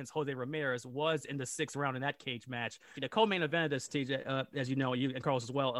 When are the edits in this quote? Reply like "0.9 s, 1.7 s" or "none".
3.0 s